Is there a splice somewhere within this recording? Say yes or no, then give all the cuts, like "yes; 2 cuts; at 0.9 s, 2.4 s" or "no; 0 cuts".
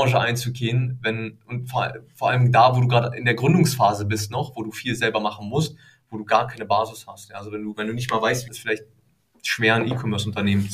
yes; 1 cut; at 8.5 s